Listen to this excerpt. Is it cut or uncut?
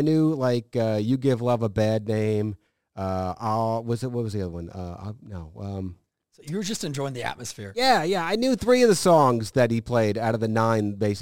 uncut